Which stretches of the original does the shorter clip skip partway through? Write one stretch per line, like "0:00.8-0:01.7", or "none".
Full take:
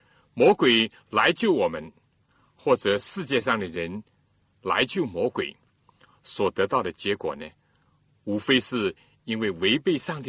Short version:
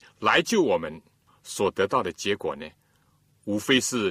0:02.2-0:06.1